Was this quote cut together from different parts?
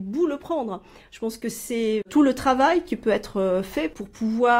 yes; 1 cut; at 2.0 s

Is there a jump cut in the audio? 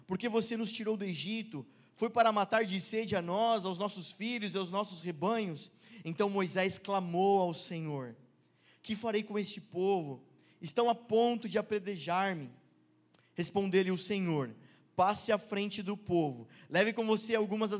no; 0 cuts

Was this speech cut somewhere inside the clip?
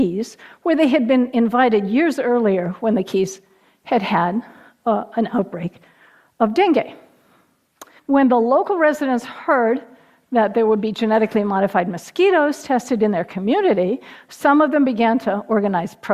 yes; 1 cut; at 8.0 s

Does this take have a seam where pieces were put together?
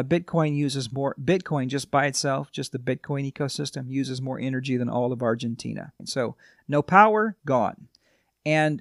yes; 2 cuts; at 6.0 s, 7.4 s

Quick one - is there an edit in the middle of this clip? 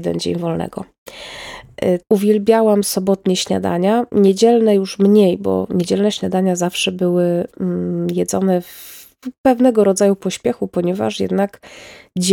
yes; 1 cut; at 2.0 s

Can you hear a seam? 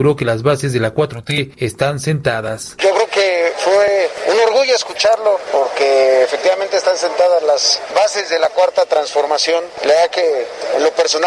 no; 0 cuts

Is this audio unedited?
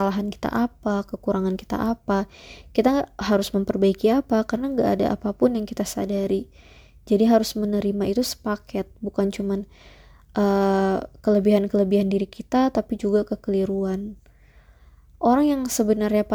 yes; 0 cuts

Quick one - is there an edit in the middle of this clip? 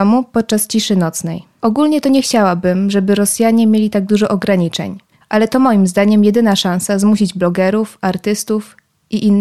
yes; 2 cuts; at 1.6 s, 5.2 s

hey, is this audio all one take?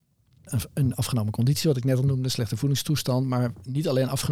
yes; 0 cuts

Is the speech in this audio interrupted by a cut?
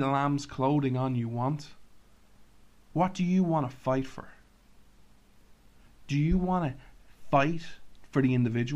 yes; 1 cut; at 2.9 s

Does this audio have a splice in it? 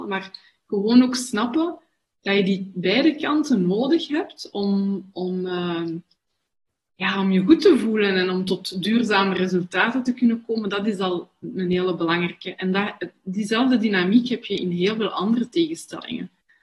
no; 0 cuts

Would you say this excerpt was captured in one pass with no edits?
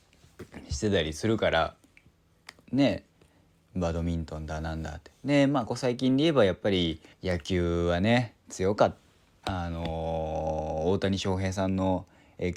no; 2 cuts; at 5.7 s, 7.1 s

